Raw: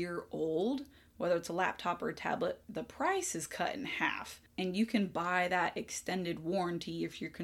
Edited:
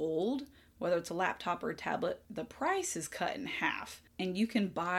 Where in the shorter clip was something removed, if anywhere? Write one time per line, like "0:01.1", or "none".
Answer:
none